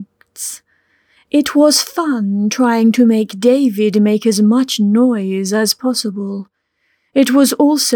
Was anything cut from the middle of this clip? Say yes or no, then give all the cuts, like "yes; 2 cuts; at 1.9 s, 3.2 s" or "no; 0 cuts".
no; 0 cuts